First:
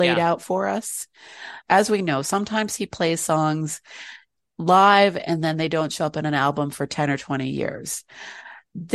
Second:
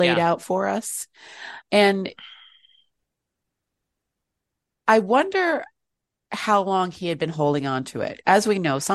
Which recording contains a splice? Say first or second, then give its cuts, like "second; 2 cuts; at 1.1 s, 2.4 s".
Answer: first; 1 cut; at 1.7 s